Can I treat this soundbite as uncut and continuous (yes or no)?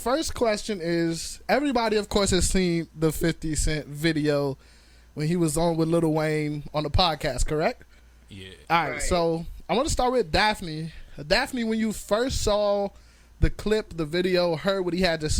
no